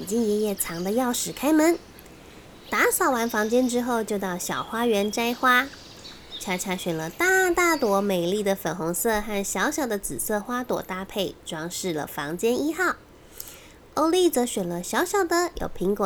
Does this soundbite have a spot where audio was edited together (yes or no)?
no